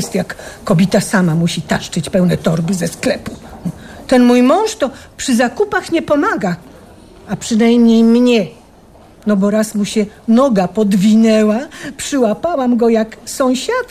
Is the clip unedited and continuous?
yes; 0 cuts

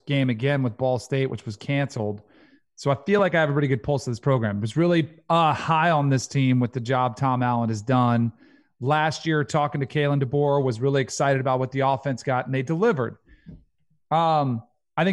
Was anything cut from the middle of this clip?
no; 0 cuts

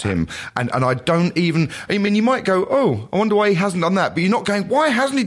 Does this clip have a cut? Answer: no; 0 cuts

